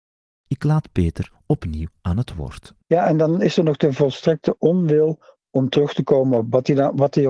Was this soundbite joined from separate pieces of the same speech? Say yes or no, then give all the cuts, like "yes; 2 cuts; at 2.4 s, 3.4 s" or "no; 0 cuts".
yes; 1 cut; at 2.8 s